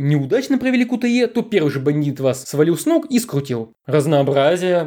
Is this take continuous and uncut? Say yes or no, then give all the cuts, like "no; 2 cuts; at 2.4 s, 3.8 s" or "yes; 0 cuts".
yes; 0 cuts